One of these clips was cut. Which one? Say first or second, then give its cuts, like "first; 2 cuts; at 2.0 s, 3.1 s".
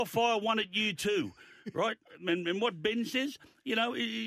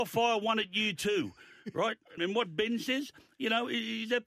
second; 1 cut; at 2.2 s